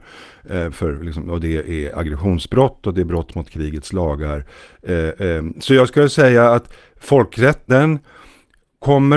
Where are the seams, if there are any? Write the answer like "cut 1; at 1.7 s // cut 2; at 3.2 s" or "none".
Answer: cut 1; at 5.5 s // cut 2; at 7.7 s